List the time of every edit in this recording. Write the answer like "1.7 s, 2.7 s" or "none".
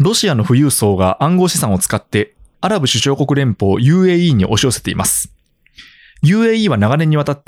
2.5 s